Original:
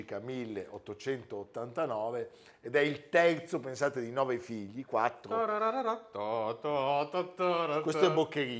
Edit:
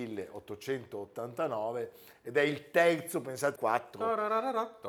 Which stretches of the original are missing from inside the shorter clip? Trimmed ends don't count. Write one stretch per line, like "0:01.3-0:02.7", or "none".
0:03.9-0:04.9

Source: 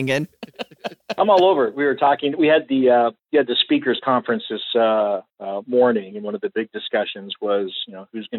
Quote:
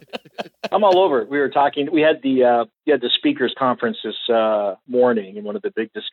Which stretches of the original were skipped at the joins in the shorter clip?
0:05.3-0:05.7

